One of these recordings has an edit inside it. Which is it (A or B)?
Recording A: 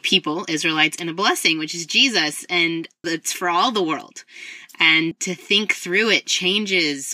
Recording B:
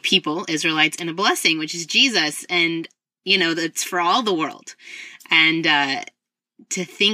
A